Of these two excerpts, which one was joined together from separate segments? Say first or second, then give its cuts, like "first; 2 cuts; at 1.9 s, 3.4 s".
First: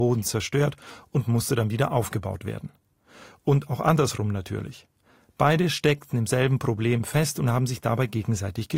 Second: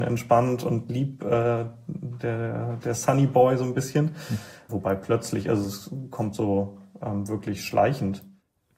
second; 1 cut; at 4.7 s